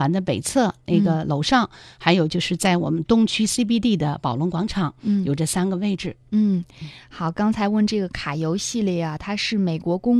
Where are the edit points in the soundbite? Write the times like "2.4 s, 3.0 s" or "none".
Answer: none